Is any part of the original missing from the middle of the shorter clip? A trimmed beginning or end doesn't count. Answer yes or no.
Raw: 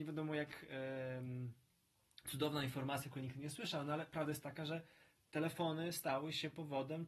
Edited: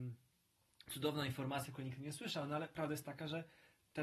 no